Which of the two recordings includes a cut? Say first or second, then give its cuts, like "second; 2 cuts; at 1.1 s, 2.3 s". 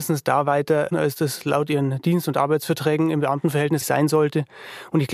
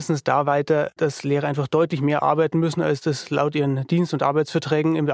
first; 2 cuts; at 0.9 s, 3.8 s